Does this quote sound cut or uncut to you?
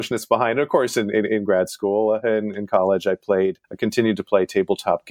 cut